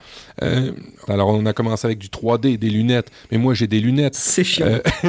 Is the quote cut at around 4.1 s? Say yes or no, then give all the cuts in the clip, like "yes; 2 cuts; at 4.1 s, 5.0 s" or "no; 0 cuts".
yes; 2 cuts; at 1.1 s, 4.1 s